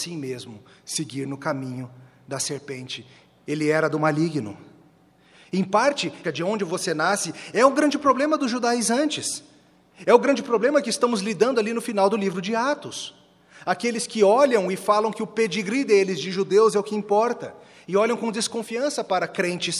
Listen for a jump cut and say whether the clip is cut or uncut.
cut